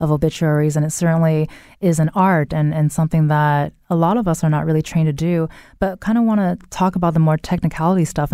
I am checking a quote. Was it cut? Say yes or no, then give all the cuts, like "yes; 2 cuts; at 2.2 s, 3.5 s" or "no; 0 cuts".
no; 0 cuts